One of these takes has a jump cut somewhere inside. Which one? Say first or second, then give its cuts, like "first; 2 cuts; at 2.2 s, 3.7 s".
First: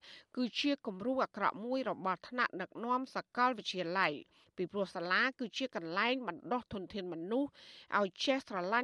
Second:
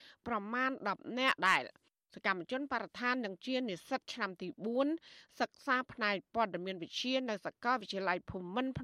second; 1 cut; at 1.4 s